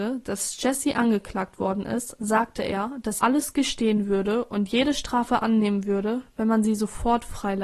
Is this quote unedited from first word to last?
no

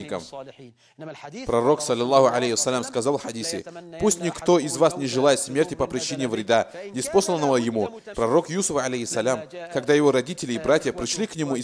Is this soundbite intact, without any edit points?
no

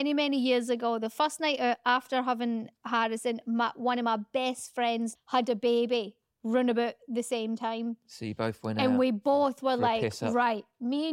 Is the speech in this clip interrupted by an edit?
yes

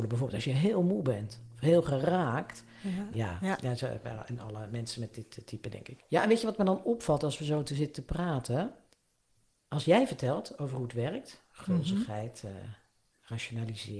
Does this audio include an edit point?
yes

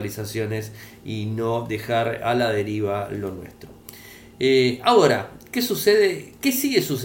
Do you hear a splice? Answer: no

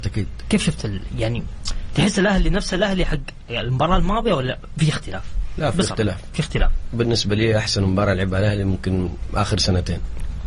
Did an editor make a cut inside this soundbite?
no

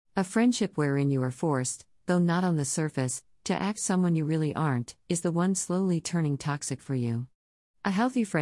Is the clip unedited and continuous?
yes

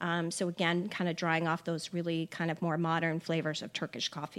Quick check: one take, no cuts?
yes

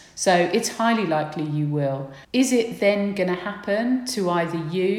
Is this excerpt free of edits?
no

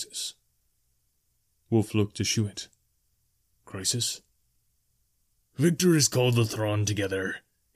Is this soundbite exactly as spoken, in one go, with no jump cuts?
yes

